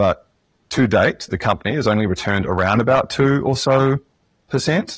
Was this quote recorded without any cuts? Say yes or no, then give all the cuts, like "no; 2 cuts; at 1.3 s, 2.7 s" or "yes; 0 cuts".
yes; 0 cuts